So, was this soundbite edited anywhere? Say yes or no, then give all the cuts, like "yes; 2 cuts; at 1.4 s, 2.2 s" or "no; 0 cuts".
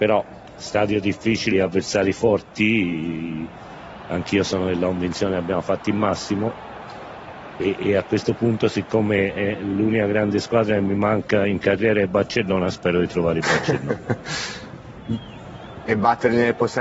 yes; 1 cut; at 1.5 s